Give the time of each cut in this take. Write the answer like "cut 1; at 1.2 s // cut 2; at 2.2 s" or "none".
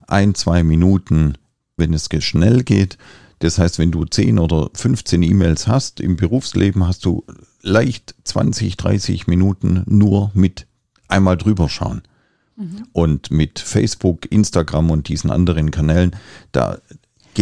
cut 1; at 1.8 s